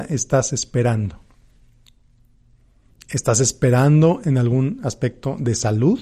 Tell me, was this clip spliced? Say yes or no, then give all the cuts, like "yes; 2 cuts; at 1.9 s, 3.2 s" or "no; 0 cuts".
yes; 1 cut; at 2.9 s